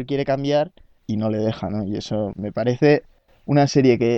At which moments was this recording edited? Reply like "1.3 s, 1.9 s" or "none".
1.0 s, 2.3 s

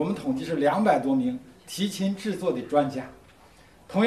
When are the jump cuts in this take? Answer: none

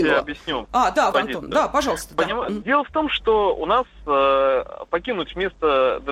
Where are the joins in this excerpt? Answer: 1.1 s, 2.6 s

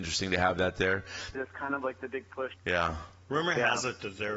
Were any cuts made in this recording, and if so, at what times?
1.3 s, 2.5 s

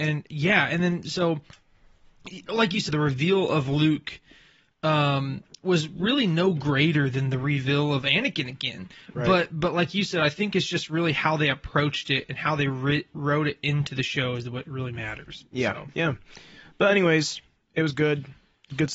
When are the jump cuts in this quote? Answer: 2.9 s

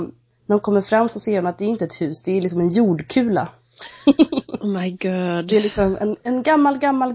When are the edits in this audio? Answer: none

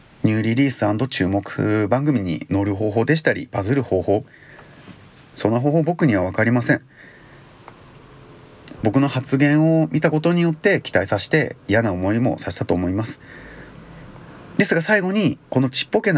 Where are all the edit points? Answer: 8.8 s

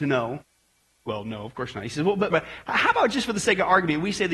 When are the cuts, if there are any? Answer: 2.3 s

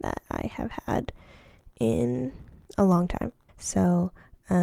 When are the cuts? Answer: 3.5 s

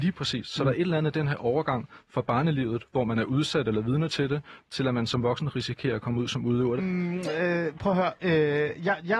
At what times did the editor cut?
6.8 s

